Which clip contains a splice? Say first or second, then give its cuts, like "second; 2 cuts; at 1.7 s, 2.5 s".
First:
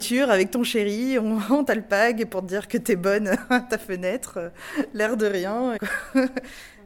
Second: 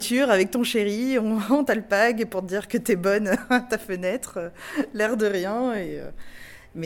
first; 1 cut; at 5.8 s